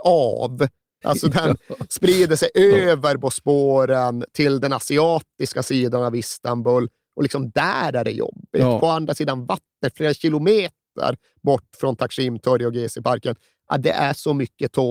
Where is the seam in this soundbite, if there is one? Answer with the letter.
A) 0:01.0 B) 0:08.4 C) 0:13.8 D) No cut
A